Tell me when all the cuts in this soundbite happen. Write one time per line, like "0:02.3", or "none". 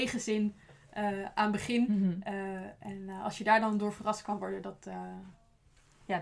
0:01.9